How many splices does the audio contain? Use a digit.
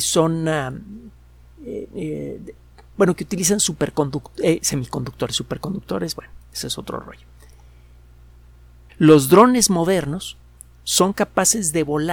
1